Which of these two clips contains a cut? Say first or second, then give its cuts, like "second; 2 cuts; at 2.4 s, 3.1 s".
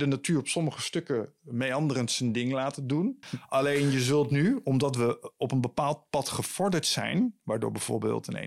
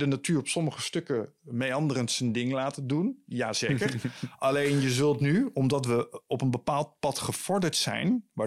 first; 1 cut; at 3.2 s